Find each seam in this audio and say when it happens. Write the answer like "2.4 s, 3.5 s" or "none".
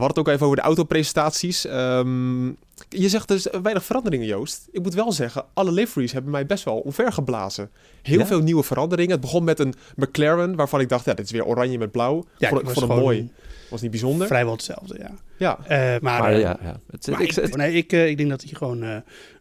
16.0 s, 17.5 s